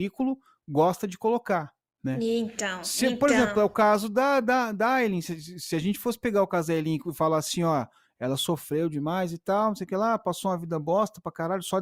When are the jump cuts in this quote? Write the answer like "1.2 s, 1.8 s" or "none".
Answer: none